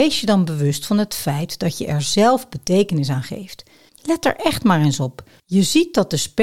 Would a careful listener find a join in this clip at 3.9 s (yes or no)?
yes